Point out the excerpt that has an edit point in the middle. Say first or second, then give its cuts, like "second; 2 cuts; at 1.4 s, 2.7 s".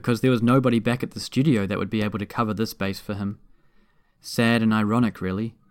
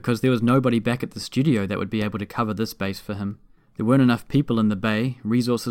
second; 1 cut; at 3.6 s